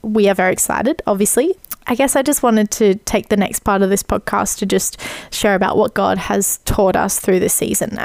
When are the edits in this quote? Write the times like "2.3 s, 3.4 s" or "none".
none

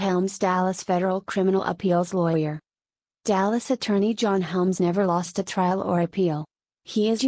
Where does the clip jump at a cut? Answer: 4.8 s

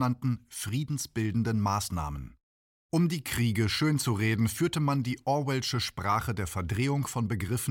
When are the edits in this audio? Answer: none

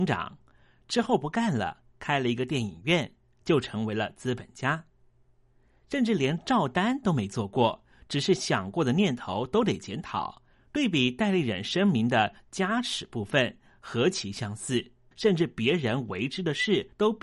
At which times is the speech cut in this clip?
10.5 s, 15.1 s

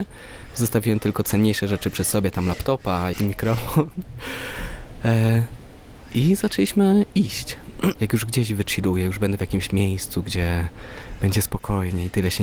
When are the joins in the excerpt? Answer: 3.1 s, 8.0 s

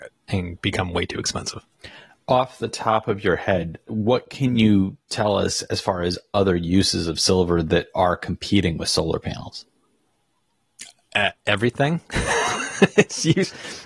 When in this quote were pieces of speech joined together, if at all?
none

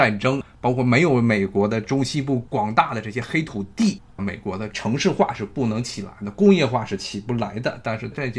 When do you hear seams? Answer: none

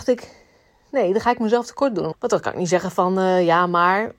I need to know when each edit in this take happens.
2.1 s

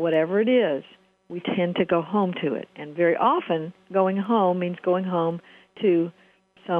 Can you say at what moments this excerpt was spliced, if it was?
none

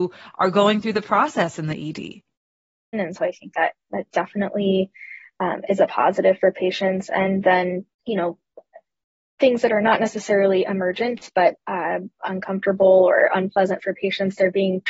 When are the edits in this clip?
2.9 s, 7.9 s

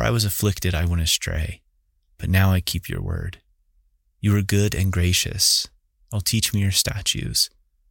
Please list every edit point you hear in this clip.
none

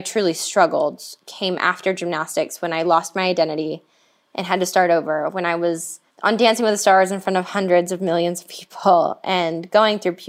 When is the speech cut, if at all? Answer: 6.1 s

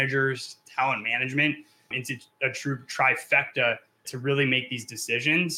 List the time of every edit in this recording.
1.9 s, 4.0 s

